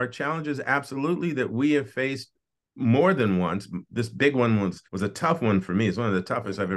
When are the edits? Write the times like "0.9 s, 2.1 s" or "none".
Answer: 4.9 s